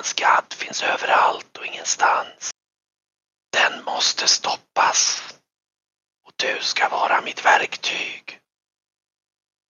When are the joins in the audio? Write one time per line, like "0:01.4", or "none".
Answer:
none